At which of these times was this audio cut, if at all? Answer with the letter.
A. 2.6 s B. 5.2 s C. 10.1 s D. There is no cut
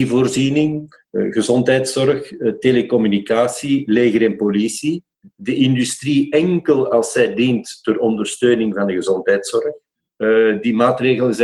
C